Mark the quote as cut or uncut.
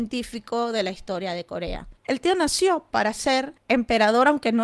cut